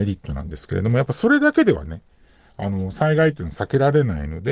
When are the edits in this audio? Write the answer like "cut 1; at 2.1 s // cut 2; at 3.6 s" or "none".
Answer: none